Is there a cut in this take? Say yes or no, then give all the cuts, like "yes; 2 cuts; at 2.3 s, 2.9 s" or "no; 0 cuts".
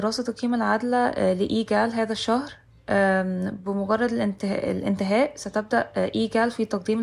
no; 0 cuts